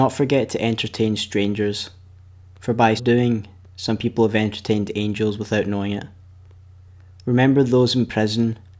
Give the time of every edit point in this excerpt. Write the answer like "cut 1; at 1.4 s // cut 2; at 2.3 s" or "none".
cut 1; at 3.0 s